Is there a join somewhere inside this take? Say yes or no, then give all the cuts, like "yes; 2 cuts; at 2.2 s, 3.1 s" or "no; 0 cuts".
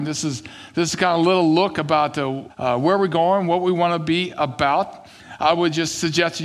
yes; 1 cut; at 2.5 s